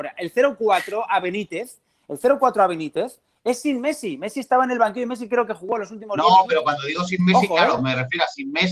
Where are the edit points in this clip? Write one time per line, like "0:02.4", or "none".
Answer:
none